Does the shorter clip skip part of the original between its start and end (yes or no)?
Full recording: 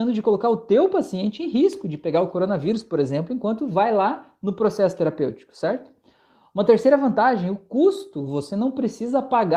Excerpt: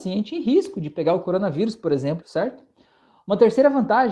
yes